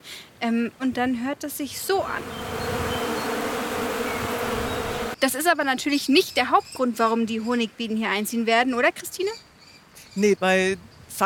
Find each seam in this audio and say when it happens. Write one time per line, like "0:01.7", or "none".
0:05.1
0:10.4